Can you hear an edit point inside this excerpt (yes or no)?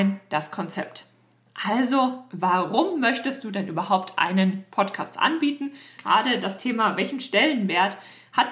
yes